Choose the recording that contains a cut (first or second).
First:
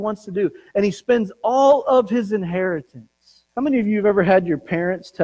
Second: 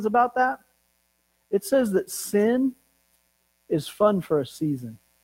first